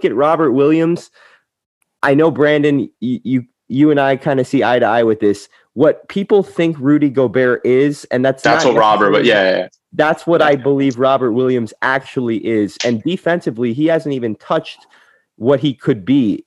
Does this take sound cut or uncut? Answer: uncut